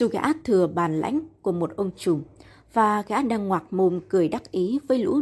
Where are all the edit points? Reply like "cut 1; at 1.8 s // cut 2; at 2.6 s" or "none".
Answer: none